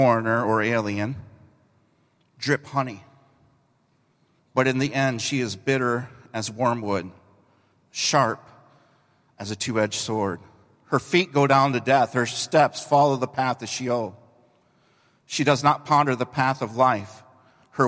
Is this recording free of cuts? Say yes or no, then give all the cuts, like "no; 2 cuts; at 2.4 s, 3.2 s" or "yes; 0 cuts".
no; 1 cut; at 4.4 s